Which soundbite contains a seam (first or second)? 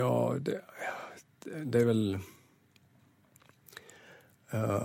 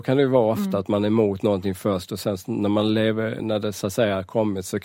second